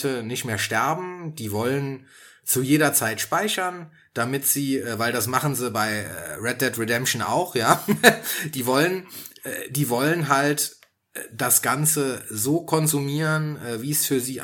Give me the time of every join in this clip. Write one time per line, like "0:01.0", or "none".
none